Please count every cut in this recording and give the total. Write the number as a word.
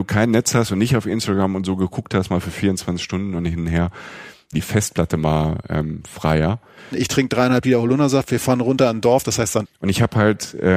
three